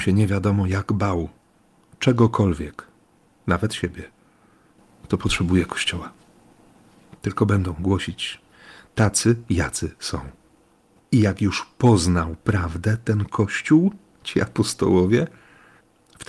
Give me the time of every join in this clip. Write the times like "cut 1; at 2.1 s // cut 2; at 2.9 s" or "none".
cut 1; at 7.2 s // cut 2; at 11.0 s